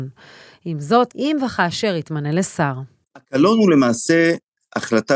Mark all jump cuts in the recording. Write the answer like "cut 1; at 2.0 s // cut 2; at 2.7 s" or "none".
cut 1; at 1.1 s

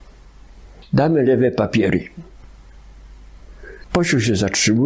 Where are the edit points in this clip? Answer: cut 1; at 3.8 s

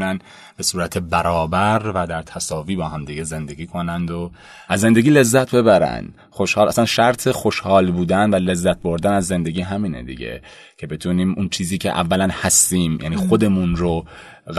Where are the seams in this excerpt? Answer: none

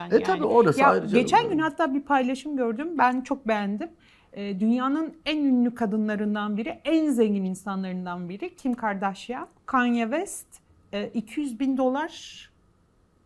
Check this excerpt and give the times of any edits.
cut 1; at 9.6 s

